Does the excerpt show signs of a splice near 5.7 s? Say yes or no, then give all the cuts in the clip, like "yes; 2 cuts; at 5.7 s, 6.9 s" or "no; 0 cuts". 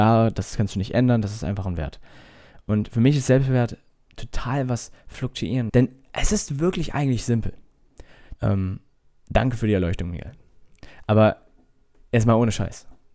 yes; 2 cuts; at 5.7 s, 8.4 s